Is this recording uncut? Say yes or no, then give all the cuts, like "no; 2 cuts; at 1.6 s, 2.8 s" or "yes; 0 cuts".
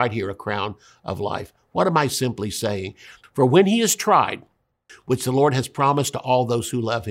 no; 2 cuts; at 3.2 s, 4.9 s